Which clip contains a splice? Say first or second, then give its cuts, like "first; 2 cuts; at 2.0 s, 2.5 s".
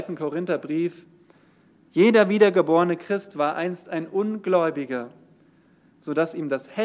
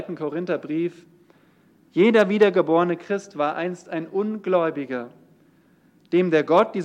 first; 1 cut; at 5.9 s